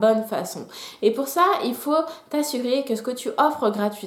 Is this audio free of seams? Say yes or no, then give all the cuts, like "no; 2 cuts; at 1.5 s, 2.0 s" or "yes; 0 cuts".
yes; 0 cuts